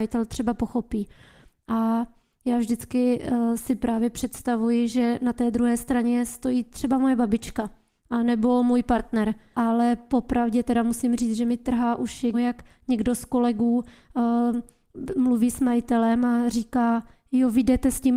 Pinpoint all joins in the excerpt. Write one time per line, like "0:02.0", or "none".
0:09.5
0:12.3